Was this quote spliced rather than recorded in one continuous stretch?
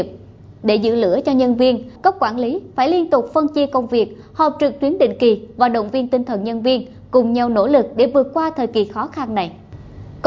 yes; 1 cut; at 2.0 s

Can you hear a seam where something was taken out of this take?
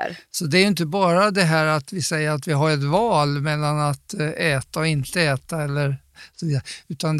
no; 0 cuts

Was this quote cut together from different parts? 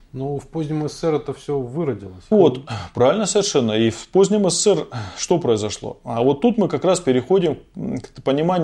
yes; 1 cut; at 2.3 s

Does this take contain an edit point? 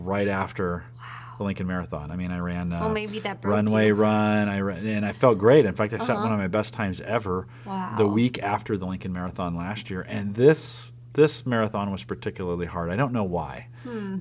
no; 0 cuts

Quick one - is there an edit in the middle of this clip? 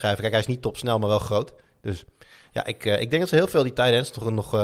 no; 0 cuts

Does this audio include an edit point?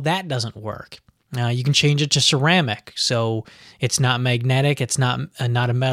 no; 0 cuts

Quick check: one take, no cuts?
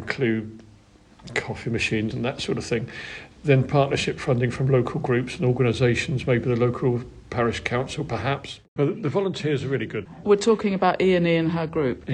no; 3 cuts; at 2.1 s, 8.8 s, 10.2 s

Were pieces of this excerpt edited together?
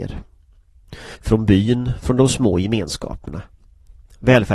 yes; 1 cut; at 1.2 s

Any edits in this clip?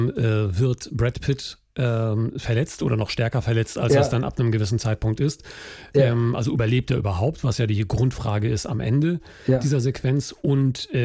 no; 0 cuts

